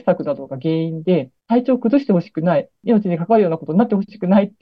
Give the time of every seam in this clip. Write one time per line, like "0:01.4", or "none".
0:01.4